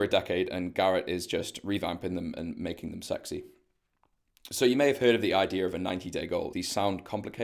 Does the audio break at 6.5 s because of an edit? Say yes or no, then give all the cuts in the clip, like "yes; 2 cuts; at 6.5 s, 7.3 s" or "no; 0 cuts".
yes; 1 cut; at 6.5 s